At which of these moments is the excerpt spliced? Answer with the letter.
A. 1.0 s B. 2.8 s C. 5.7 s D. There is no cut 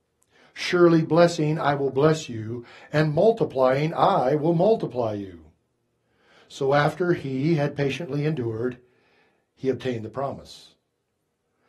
D